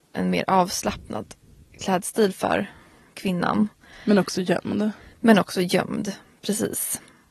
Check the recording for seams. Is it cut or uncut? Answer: uncut